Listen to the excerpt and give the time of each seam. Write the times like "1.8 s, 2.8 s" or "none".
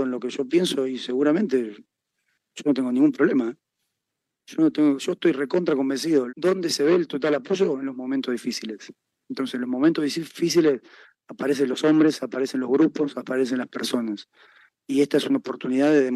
6.3 s